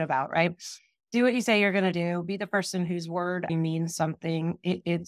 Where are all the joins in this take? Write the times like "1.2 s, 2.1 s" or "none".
3.5 s